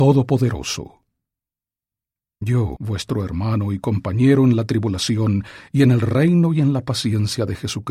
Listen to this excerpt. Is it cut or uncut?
cut